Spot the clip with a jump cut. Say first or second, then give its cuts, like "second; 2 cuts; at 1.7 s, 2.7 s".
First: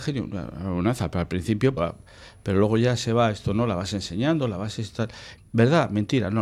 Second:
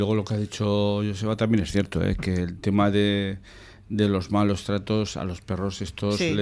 first; 2 cuts; at 1.8 s, 5.4 s